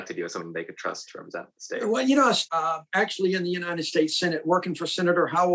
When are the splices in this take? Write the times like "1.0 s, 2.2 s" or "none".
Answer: 2.5 s

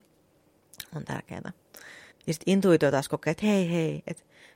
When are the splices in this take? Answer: 2.1 s, 3.4 s

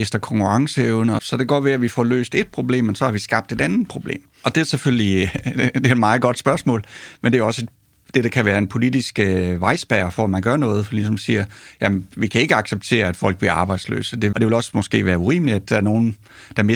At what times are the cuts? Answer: 1.2 s, 14.3 s

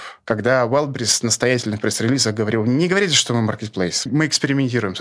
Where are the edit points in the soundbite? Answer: 4.1 s

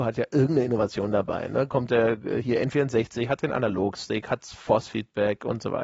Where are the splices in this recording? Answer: none

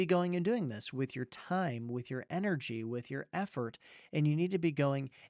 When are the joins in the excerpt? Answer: none

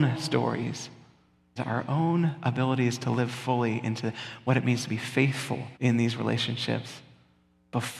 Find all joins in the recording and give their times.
1.6 s, 5.7 s

